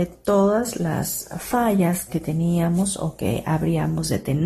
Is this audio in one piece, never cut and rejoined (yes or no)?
yes